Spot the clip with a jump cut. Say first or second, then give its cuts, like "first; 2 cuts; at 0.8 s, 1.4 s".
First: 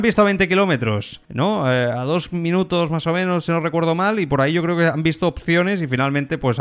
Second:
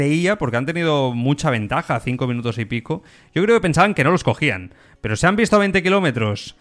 first; 1 cut; at 1.2 s